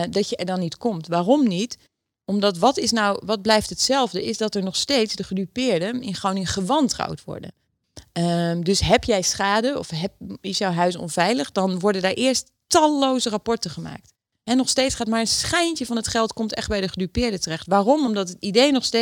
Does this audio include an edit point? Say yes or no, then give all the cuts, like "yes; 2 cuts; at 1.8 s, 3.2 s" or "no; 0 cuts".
no; 0 cuts